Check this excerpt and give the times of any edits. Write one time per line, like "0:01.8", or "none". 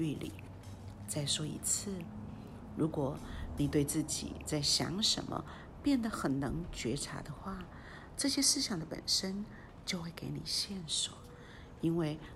none